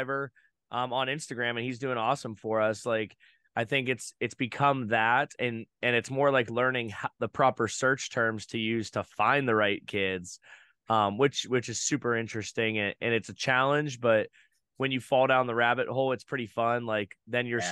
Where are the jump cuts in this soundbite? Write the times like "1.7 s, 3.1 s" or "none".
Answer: none